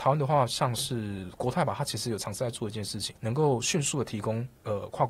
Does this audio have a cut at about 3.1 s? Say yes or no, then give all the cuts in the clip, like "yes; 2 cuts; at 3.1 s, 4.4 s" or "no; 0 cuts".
yes; 1 cut; at 3.1 s